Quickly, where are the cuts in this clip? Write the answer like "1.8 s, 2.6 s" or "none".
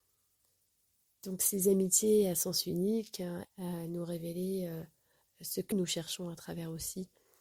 3.4 s, 5.7 s